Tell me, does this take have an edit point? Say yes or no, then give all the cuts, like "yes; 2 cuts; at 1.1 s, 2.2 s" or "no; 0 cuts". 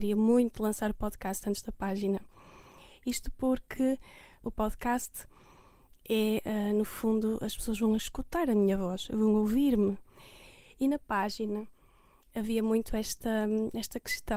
yes; 1 cut; at 4.4 s